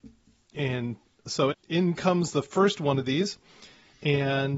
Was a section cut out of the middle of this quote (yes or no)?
yes